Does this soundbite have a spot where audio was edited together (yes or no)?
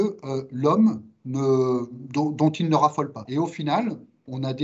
yes